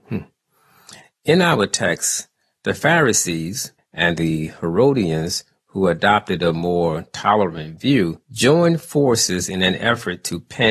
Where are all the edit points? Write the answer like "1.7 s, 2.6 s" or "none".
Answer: 3.8 s, 8.2 s